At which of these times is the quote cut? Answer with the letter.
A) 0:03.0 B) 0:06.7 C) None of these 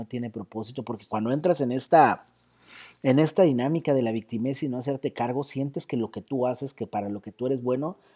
C